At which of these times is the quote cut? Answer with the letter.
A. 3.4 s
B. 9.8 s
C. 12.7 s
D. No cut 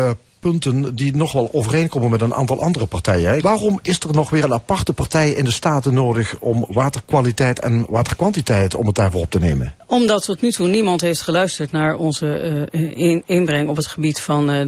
A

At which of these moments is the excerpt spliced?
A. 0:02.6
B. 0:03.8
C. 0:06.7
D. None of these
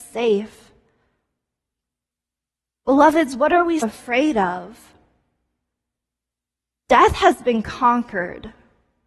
B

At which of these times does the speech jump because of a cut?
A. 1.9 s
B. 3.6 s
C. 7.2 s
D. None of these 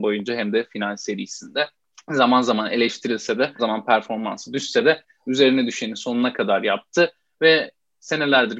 B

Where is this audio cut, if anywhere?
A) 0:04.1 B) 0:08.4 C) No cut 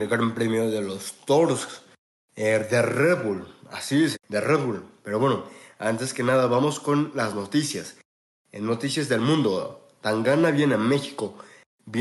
A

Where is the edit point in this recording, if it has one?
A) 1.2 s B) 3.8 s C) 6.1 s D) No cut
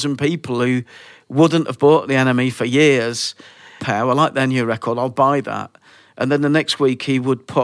B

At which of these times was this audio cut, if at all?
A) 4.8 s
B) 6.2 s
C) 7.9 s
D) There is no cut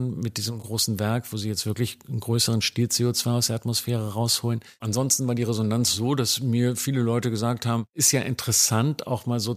A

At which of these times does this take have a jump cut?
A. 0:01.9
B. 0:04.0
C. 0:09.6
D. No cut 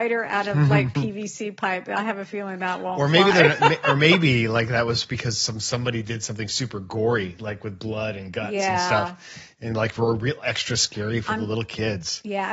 D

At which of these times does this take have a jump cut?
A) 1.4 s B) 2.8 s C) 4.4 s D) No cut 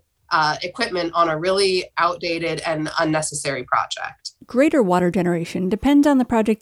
C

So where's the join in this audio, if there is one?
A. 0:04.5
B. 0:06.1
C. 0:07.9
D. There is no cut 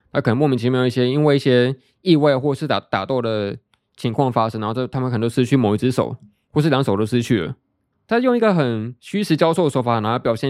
C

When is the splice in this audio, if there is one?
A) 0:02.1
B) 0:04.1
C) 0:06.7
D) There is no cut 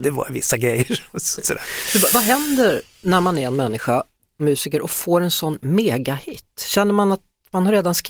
D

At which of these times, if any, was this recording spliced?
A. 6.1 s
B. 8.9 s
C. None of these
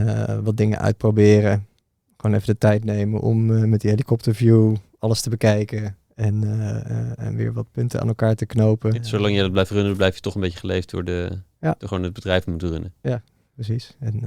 B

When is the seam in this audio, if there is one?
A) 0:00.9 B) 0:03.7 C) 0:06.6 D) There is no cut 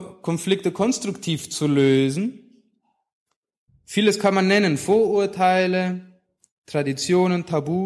B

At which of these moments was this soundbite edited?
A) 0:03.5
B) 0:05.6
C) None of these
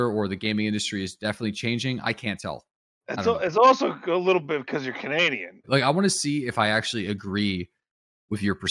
B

